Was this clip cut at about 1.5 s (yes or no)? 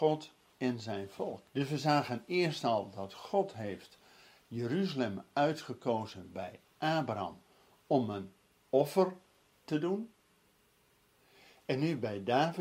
yes